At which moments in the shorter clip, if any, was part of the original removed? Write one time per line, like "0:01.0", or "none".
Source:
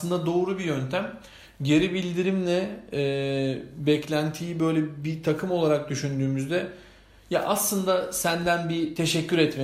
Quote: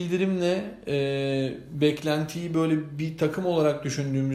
none